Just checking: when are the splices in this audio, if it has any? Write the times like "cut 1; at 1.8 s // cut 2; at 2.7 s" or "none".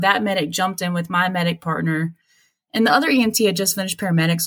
none